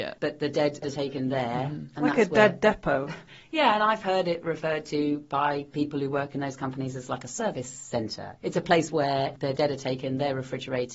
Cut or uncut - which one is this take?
uncut